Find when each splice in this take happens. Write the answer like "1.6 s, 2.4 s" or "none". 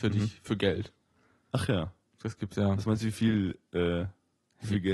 none